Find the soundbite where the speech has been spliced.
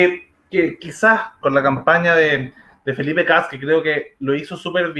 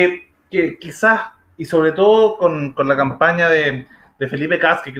first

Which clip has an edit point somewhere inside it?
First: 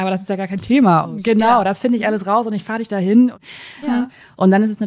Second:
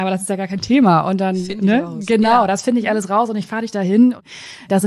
first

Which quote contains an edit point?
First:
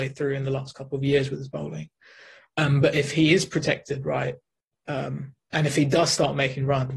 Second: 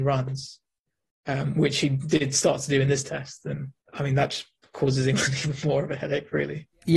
second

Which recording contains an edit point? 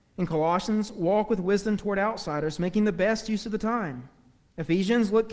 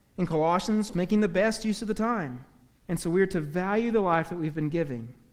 second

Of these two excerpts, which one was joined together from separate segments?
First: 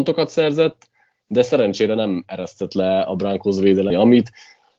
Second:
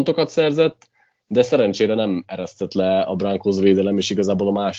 first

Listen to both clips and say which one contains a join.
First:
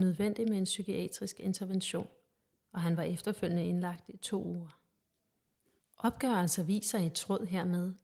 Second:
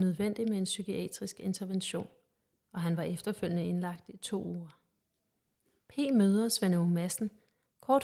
first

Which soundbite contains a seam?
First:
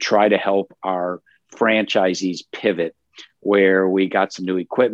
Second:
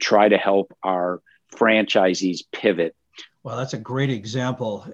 second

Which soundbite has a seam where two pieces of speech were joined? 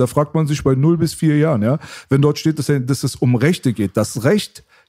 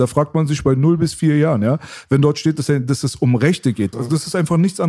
second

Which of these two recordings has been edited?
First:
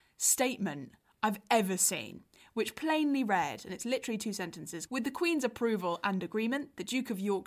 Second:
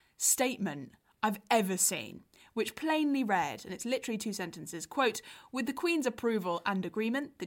first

